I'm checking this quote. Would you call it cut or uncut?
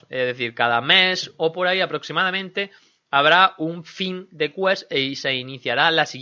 uncut